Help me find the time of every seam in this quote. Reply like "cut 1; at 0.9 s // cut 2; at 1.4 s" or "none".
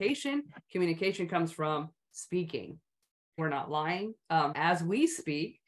cut 1; at 3.4 s // cut 2; at 4.5 s